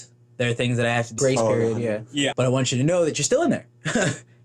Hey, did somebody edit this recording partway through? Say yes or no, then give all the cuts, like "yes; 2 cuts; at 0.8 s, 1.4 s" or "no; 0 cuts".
yes; 2 cuts; at 1.2 s, 2.3 s